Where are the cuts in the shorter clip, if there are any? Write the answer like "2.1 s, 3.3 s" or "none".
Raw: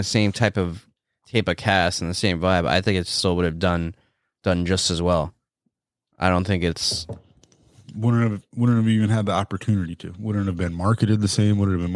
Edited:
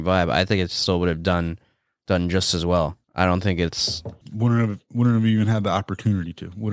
3.0 s, 4.2 s